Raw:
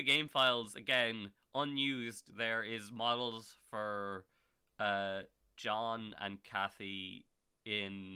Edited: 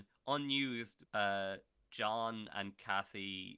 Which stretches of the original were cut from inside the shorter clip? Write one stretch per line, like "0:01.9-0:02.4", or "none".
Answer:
0:02.3-0:04.7